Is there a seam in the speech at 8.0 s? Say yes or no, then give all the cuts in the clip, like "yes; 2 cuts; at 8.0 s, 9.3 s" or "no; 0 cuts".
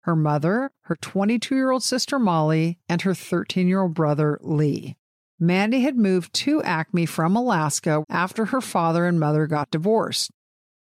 yes; 2 cuts; at 5.2 s, 8.0 s